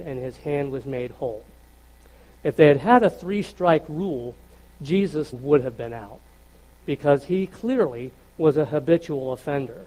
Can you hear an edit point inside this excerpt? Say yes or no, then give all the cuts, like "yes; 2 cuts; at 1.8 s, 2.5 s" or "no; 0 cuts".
yes; 2 cuts; at 2.4 s, 5.3 s